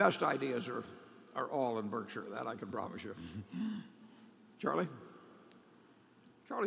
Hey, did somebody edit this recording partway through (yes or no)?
no